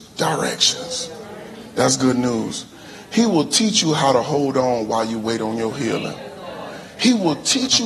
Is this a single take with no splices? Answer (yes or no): yes